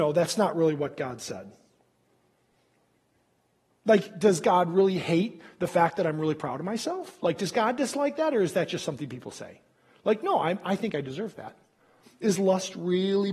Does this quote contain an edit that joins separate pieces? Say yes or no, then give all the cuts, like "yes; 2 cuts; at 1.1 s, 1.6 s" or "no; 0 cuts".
no; 0 cuts